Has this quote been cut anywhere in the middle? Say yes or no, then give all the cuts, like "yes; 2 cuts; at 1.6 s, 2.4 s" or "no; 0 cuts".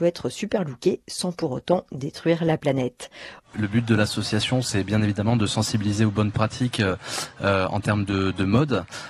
yes; 1 cut; at 3.4 s